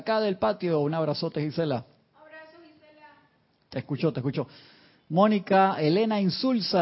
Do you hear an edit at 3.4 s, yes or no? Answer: no